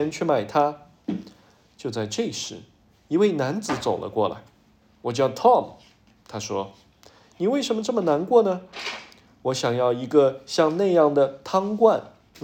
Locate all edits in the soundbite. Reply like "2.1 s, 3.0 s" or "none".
none